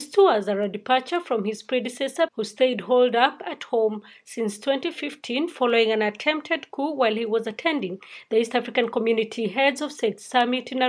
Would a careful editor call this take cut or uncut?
cut